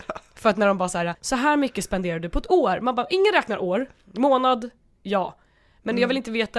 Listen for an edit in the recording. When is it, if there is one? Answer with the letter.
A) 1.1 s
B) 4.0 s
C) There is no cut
A